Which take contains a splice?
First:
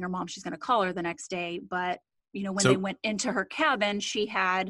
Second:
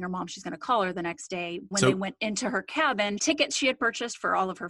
second; 2 cuts; at 1.7 s, 3.2 s

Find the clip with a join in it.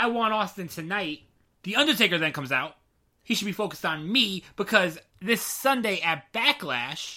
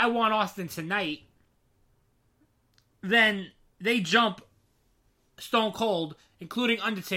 first; 3 cuts; at 1.6 s, 3.2 s, 5.1 s

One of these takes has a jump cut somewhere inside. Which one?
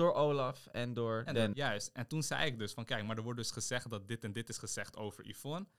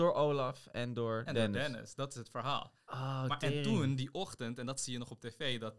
first; 1 cut; at 1.5 s

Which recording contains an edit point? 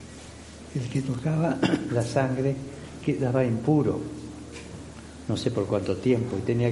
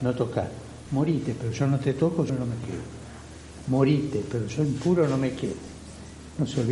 second; 1 cut; at 2.3 s

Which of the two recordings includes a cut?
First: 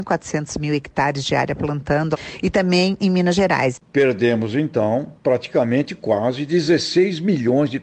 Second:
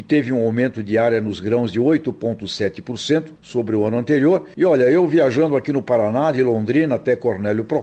first; 1 cut; at 3.9 s

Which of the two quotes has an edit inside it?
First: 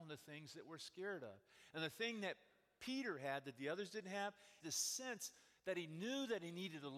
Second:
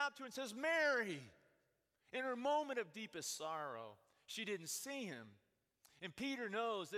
first; 1 cut; at 4.6 s

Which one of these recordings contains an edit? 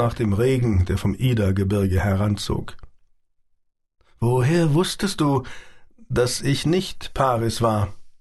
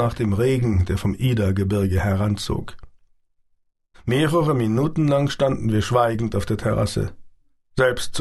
second; 1 cut; at 3.9 s

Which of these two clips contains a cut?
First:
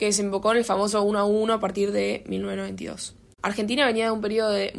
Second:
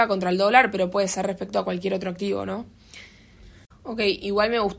second; 1 cut; at 3.7 s

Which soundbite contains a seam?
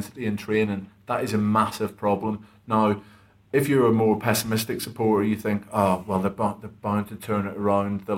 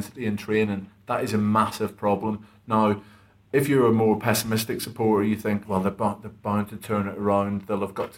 second; 1 cut; at 5.6 s

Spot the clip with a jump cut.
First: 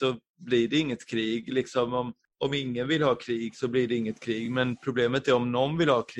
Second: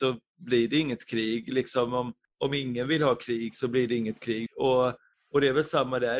second; 1 cut; at 4.5 s

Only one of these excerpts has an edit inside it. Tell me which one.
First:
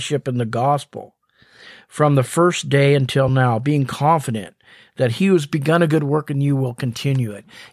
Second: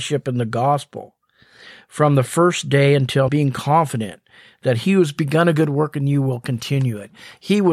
second; 1 cut; at 3.3 s

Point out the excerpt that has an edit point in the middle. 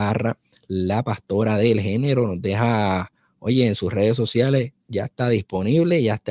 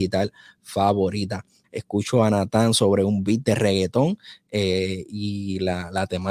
second; 1 cut; at 1.6 s

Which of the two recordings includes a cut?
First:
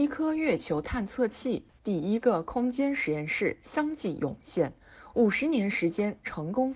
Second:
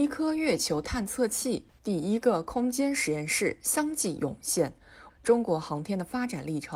second; 1 cut; at 5.1 s

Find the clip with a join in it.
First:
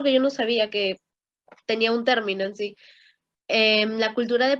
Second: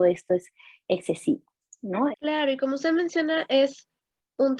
second; 1 cut; at 2.1 s

